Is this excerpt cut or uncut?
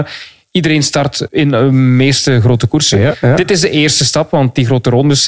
cut